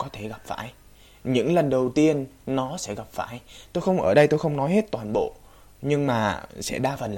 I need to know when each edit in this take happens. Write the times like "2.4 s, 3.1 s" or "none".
none